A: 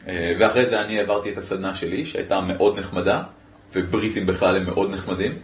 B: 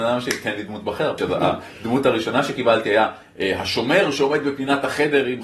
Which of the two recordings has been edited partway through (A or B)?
B